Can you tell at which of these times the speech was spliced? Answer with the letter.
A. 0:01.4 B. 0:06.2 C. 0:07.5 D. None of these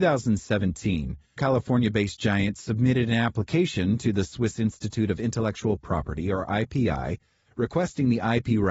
A